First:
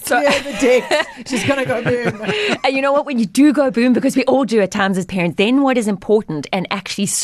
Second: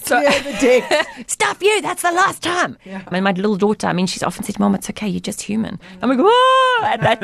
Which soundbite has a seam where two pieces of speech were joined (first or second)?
second